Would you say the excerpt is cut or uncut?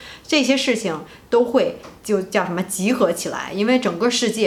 cut